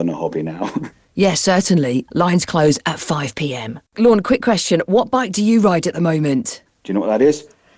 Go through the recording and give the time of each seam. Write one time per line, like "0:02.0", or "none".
0:02.1
0:03.9
0:06.7